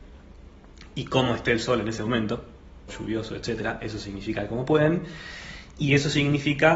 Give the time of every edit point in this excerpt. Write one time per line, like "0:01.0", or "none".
0:02.9